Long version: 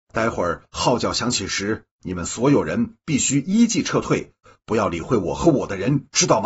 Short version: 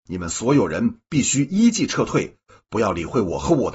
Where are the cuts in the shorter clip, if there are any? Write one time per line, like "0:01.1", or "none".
none